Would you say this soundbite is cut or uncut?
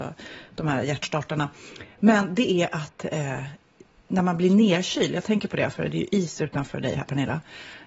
uncut